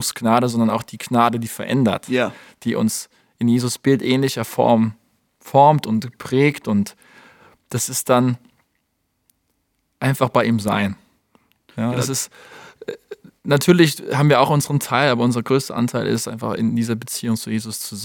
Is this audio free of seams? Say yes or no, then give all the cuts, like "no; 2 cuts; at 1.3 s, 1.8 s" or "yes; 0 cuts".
yes; 0 cuts